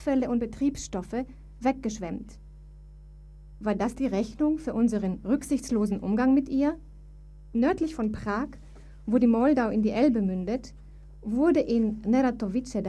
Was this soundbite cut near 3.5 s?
yes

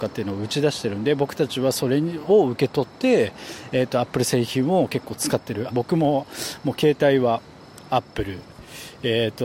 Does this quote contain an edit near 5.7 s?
yes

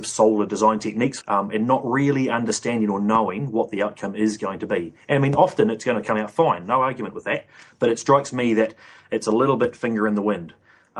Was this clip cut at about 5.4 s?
no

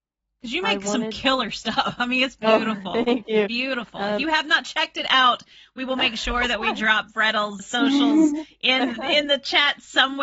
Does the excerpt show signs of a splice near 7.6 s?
yes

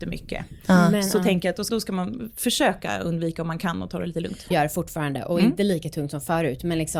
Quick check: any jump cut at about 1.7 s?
yes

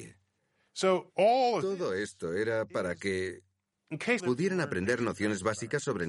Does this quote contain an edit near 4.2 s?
yes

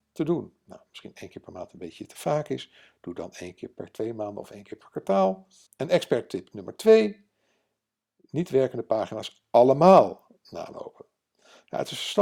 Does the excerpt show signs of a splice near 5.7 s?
yes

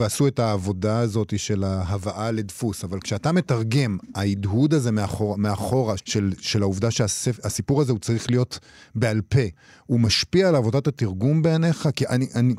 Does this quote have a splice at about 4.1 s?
no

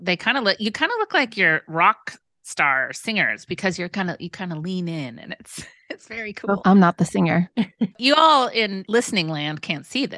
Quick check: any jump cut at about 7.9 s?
yes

